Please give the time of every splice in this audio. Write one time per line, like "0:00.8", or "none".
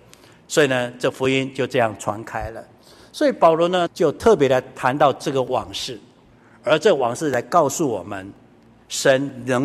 0:03.9